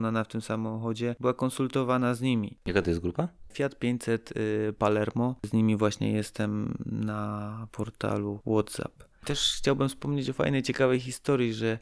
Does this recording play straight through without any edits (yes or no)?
no